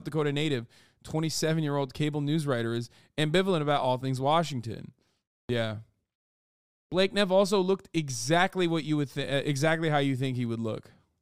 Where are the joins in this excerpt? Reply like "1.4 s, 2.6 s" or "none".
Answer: none